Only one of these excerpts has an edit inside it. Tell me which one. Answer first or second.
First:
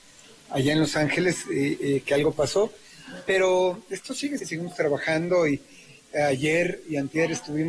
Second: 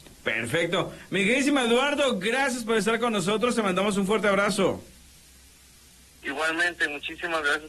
first